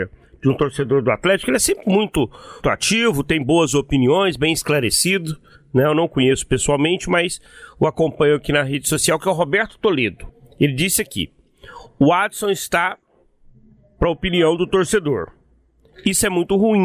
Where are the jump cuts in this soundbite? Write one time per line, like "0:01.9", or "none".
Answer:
0:02.6

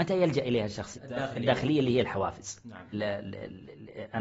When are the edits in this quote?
0:00.9
0:02.9

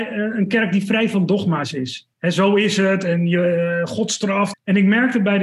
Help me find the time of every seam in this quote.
0:02.1
0:04.5

